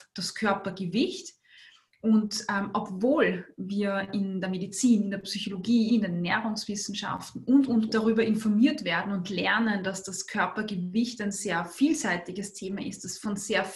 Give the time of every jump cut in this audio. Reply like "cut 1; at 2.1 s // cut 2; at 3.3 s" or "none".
cut 1; at 5.9 s // cut 2; at 7.9 s